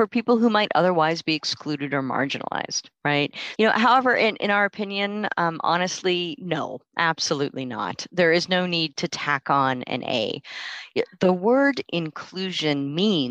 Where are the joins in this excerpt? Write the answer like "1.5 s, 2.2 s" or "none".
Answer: 3.6 s